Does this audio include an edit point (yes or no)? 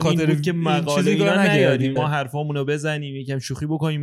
yes